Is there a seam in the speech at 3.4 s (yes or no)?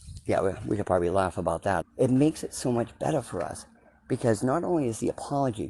no